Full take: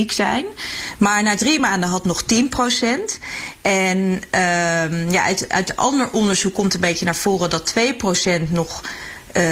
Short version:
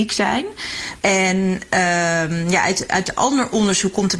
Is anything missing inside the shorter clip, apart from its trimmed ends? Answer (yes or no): yes